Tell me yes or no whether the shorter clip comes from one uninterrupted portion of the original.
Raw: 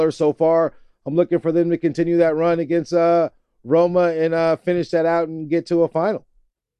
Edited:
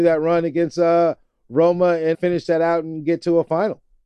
no